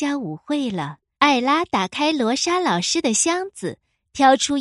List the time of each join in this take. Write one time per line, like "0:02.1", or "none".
0:01.2